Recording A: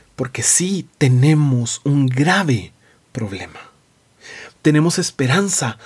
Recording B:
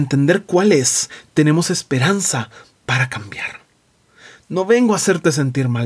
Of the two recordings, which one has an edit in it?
A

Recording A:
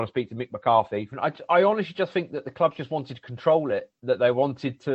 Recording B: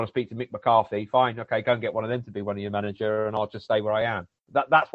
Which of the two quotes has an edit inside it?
A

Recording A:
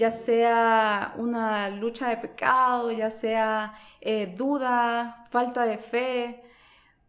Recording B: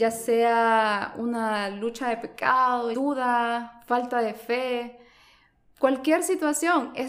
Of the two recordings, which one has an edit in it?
B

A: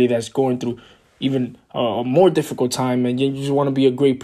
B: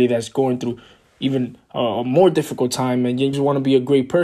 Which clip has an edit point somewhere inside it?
B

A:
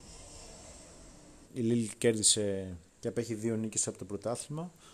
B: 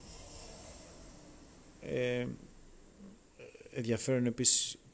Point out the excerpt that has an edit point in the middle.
A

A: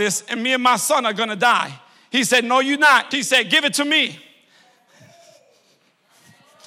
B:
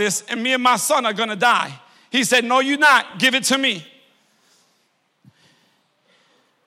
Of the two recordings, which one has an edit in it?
A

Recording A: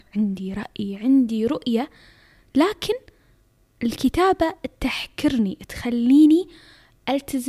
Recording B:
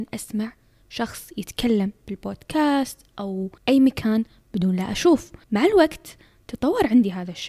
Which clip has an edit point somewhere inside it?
B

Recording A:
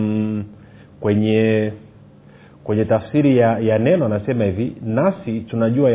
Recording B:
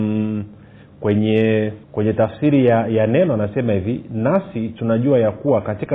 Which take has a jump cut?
B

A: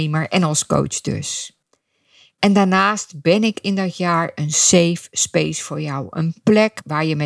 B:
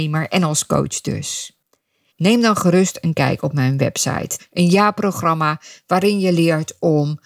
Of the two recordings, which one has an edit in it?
B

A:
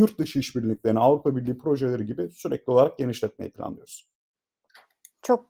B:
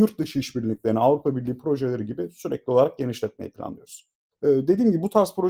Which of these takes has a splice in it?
B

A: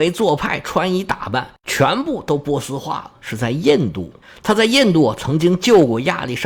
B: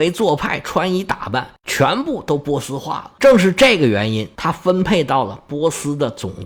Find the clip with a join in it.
A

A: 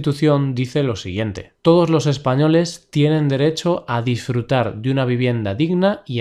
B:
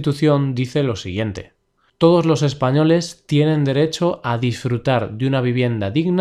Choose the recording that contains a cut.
A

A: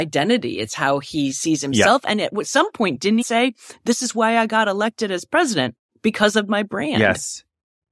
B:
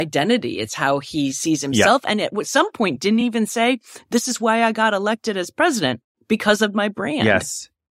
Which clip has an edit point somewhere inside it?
A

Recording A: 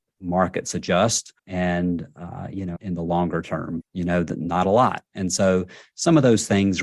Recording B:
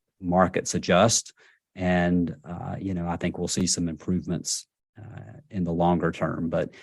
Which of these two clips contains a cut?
A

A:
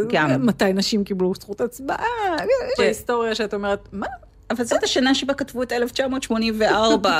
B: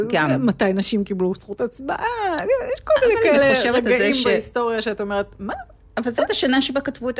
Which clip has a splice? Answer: A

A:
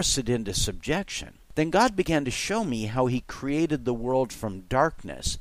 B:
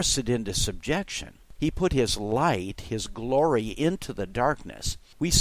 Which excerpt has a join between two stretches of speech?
B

